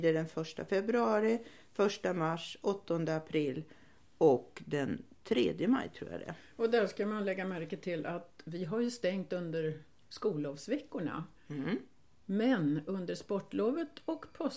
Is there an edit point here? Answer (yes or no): no